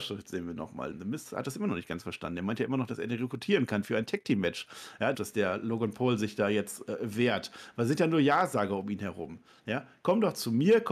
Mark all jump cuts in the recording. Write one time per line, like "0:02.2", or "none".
0:00.9
0:05.1